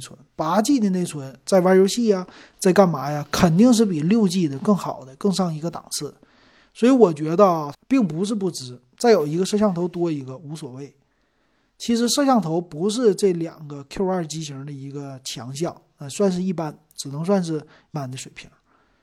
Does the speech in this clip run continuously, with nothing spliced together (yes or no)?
no